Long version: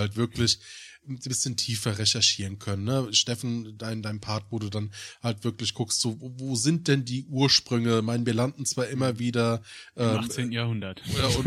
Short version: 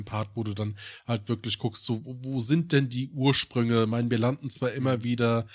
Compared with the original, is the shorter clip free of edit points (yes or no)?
yes